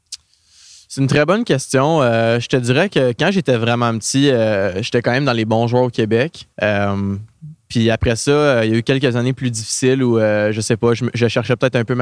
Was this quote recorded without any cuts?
no; 1 cut; at 6.5 s

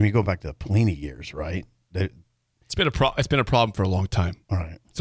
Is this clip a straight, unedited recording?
yes; 0 cuts

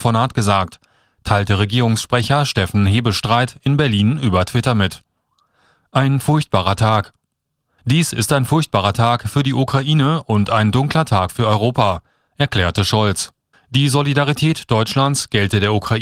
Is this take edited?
yes; 2 cuts; at 7.8 s, 13.5 s

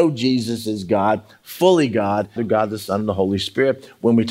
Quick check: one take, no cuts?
no; 1 cut; at 2.4 s

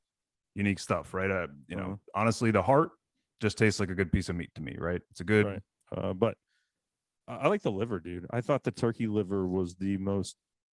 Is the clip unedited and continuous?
no; 1 cut; at 5.8 s

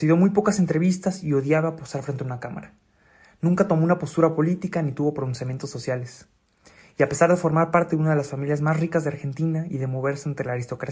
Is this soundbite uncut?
yes; 0 cuts

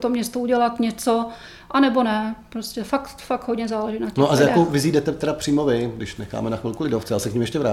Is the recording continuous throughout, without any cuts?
yes; 0 cuts

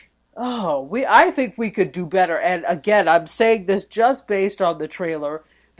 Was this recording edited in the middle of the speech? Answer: no; 0 cuts

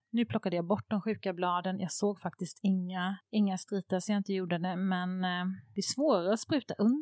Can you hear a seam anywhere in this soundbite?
no; 0 cuts

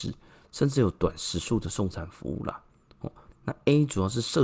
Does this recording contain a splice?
yes; 1 cut; at 3.3 s

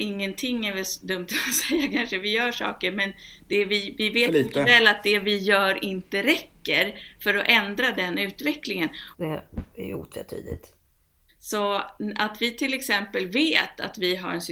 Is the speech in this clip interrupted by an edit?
yes; 2 cuts; at 9.1 s, 11.3 s

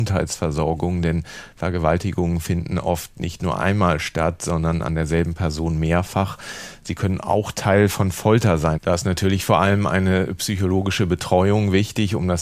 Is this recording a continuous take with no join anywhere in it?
no; 1 cut; at 8.8 s

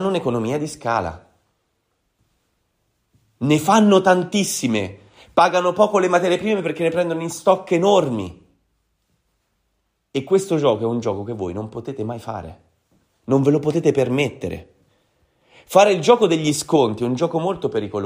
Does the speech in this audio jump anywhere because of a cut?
no; 0 cuts

